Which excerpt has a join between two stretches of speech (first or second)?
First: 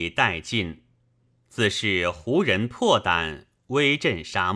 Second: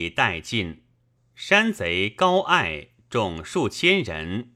second